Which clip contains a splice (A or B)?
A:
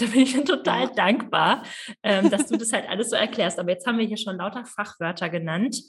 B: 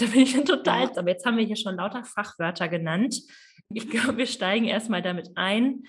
B